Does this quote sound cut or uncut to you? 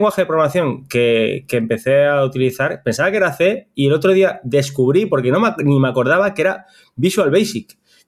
uncut